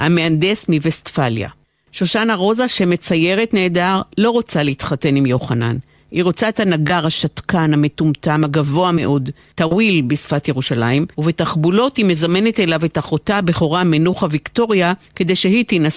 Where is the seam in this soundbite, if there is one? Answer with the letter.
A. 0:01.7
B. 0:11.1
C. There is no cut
B